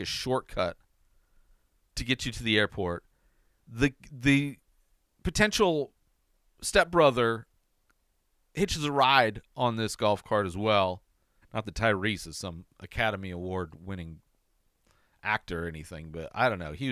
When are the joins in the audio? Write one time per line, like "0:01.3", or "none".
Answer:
0:11.4